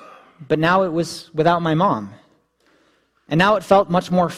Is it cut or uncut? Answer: uncut